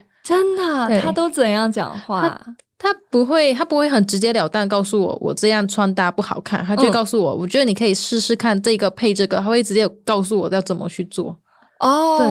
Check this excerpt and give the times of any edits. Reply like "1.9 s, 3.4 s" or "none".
none